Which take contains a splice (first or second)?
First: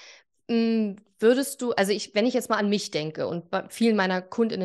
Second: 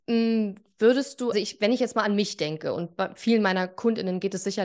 second